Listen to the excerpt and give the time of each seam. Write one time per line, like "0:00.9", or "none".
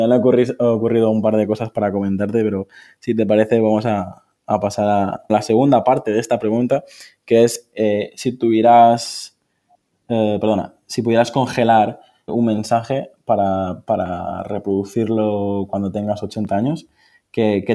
0:05.3
0:12.3